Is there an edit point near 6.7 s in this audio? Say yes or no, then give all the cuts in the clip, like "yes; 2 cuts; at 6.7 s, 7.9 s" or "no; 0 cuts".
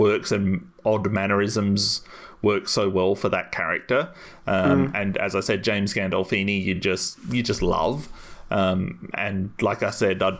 no; 0 cuts